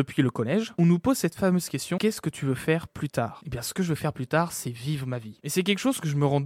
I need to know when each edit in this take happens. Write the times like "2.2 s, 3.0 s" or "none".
none